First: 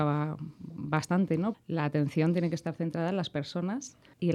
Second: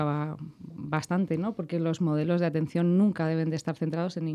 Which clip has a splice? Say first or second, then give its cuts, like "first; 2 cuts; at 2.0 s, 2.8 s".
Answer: first; 1 cut; at 1.5 s